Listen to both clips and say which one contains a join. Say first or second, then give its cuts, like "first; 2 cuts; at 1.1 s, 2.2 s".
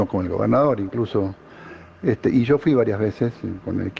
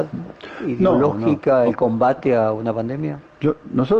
second; 1 cut; at 1.6 s